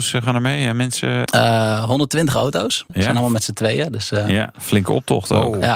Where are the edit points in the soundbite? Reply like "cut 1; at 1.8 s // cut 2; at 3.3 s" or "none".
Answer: cut 1; at 1.3 s // cut 2; at 2.9 s